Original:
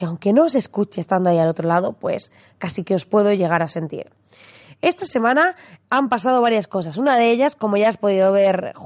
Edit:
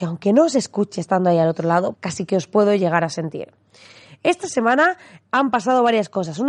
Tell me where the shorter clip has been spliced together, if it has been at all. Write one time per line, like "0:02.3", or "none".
0:01.9